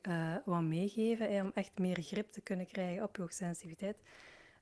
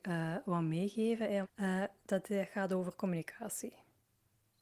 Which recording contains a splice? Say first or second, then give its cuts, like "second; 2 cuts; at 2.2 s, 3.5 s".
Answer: second; 1 cut; at 1.4 s